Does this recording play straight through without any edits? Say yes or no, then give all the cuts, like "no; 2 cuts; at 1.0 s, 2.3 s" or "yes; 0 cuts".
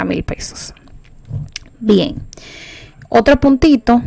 yes; 0 cuts